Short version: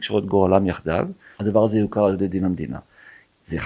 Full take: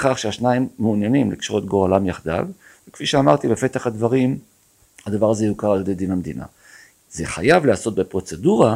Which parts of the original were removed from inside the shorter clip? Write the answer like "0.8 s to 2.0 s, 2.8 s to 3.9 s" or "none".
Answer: 2.8 s to 5.0 s